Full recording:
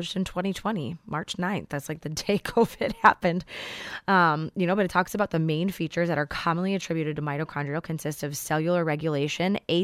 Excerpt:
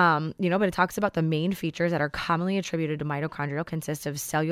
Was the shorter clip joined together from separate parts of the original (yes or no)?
no